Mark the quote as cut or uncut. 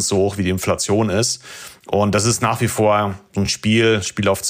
uncut